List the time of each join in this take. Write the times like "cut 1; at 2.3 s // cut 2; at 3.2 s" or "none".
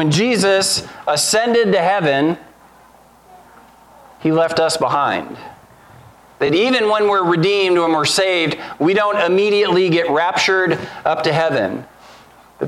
none